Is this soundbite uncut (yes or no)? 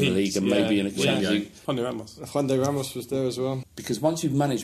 no